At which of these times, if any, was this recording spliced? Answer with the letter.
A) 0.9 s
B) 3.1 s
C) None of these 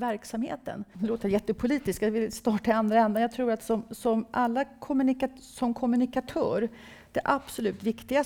A